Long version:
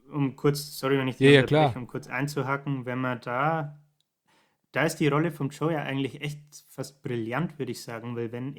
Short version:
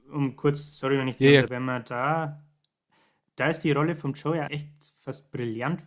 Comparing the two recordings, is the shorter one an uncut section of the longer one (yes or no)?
no